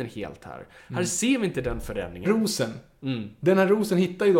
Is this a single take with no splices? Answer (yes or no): no